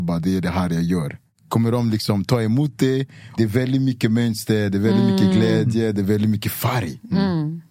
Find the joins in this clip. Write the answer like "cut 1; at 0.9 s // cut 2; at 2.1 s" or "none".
cut 1; at 3.4 s

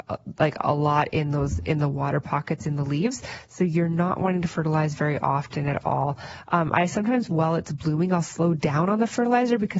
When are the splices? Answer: none

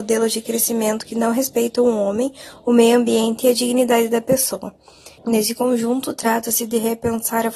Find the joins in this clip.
cut 1; at 5.2 s

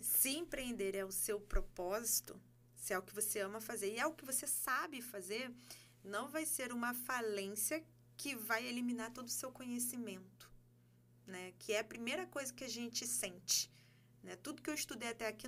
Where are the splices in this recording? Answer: none

